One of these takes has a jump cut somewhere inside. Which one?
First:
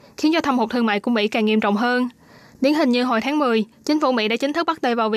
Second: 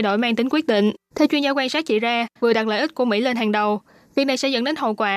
second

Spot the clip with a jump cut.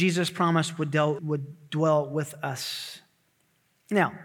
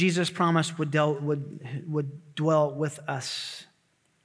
first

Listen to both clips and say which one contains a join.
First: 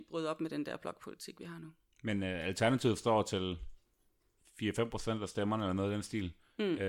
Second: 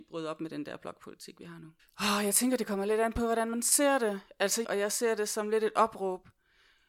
second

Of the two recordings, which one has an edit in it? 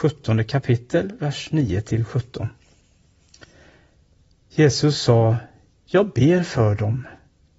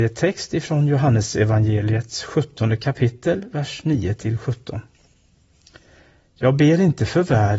second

